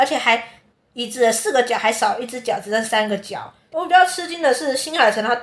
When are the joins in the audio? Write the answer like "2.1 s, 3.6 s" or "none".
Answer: 3.7 s